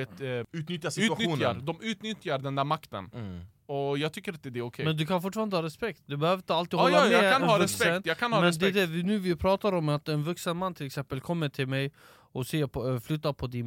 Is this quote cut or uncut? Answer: uncut